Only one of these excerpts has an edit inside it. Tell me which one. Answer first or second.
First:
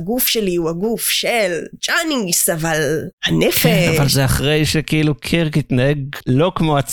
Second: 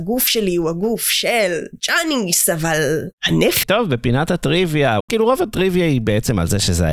second